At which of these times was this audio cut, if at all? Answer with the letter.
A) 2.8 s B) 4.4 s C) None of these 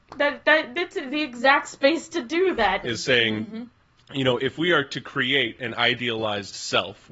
A